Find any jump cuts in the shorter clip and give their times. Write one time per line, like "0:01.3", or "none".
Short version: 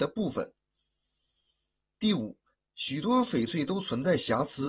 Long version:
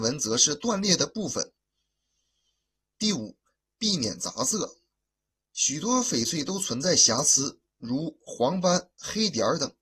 0:02.5